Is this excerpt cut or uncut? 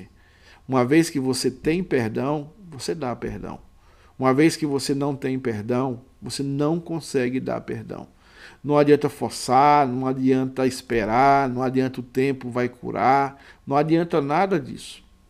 uncut